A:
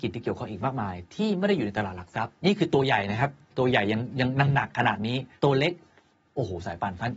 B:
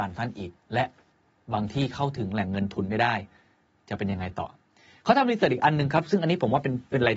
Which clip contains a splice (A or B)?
A